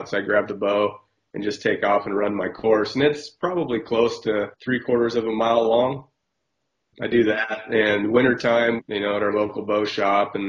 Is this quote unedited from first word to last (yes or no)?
no